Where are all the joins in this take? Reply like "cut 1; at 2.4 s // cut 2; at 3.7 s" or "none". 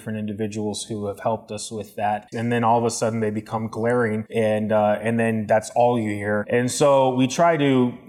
cut 1; at 2.3 s